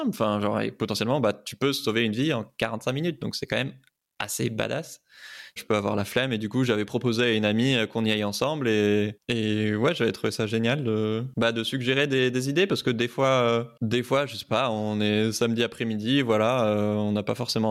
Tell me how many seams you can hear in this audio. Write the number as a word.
one